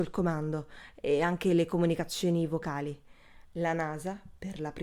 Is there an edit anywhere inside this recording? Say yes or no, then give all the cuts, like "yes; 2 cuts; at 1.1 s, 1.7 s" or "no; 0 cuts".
yes; 1 cut; at 3.5 s